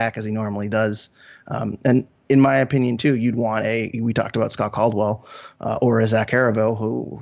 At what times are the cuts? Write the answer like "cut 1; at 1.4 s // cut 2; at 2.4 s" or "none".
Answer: none